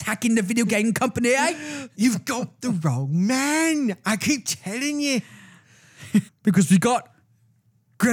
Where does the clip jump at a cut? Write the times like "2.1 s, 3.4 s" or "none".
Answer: 1.9 s, 6.3 s